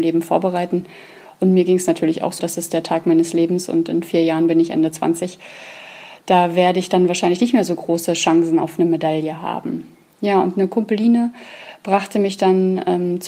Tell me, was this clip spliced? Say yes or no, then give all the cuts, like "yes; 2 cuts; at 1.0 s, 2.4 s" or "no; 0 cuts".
yes; 1 cut; at 2.4 s